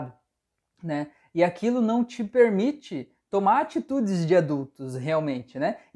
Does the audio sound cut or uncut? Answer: uncut